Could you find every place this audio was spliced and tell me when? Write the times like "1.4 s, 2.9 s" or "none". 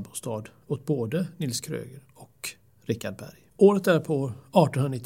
3.5 s

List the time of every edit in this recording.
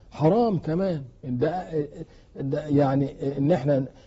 2.4 s

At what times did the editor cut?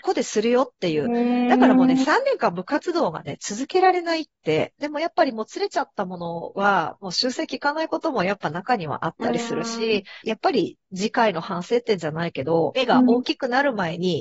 4.8 s, 10.2 s, 12.7 s

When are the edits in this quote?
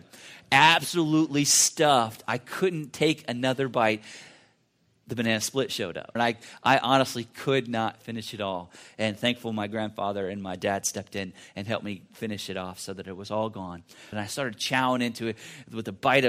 6.2 s, 14.1 s

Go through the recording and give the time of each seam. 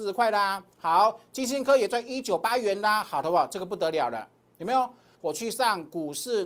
5.1 s

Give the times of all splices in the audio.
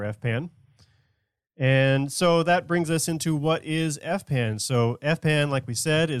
none

